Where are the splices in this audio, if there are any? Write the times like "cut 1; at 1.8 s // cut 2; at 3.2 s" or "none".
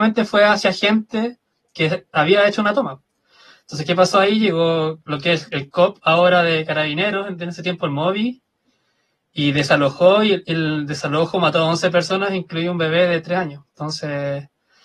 none